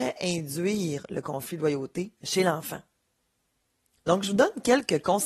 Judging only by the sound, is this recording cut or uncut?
cut